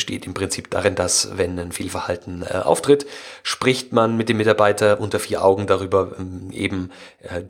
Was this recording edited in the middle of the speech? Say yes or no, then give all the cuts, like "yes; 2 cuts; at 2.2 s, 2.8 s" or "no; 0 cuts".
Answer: no; 0 cuts